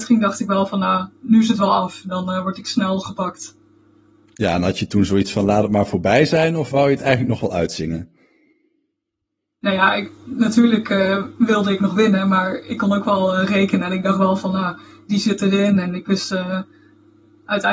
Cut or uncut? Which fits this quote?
uncut